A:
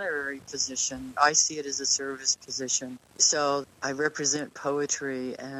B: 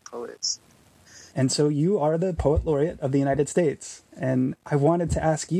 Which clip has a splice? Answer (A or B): B